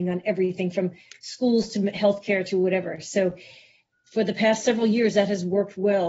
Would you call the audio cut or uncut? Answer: uncut